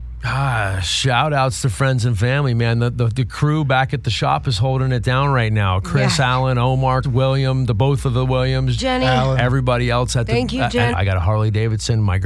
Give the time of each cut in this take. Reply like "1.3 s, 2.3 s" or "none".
7.0 s, 8.8 s, 10.9 s